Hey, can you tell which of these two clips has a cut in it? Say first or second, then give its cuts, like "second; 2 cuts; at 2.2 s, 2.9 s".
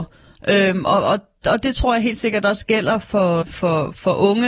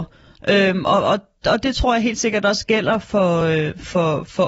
first; 1 cut; at 3.4 s